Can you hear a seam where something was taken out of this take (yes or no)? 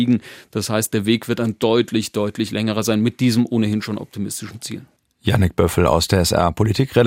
no